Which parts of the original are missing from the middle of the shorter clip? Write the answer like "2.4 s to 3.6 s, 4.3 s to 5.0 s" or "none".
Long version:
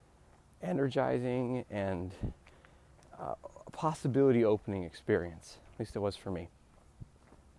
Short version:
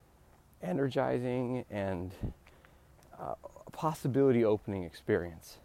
none